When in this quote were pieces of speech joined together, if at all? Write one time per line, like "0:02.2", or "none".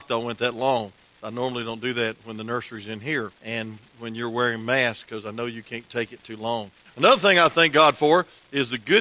0:03.4
0:06.9